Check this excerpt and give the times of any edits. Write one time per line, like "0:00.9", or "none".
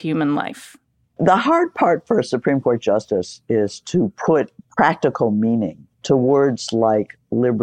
0:05.9